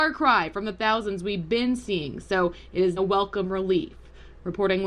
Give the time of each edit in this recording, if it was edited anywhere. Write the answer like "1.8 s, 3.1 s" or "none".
3.0 s